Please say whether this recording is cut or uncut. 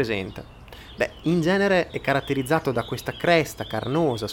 uncut